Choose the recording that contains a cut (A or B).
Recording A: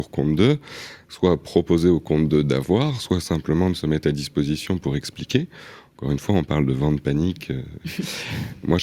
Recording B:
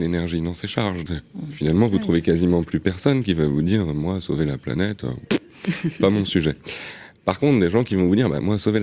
B